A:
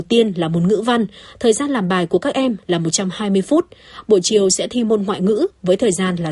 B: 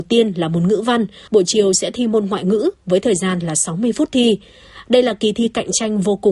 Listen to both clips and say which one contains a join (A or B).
B